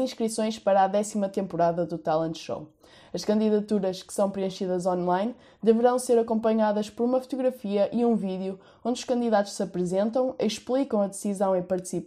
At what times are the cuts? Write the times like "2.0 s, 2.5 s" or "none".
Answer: none

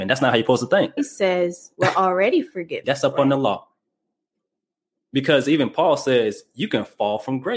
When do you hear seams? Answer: 1.0 s, 2.8 s

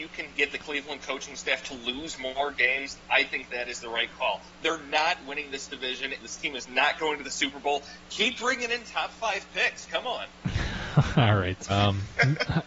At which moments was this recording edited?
6.2 s, 11.7 s

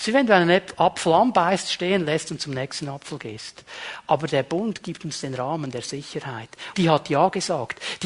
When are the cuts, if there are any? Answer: 6.7 s

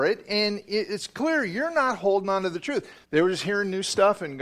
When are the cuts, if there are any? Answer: 3.0 s

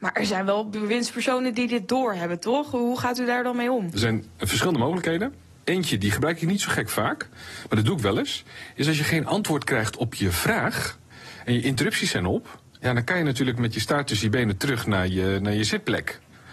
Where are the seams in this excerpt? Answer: none

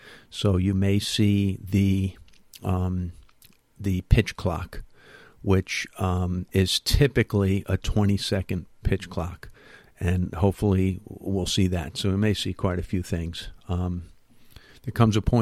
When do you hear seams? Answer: none

